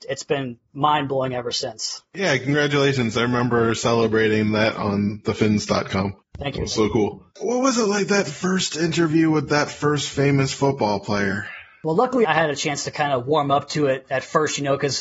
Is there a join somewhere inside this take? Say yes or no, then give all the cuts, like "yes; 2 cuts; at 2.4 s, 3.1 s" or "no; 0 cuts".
no; 0 cuts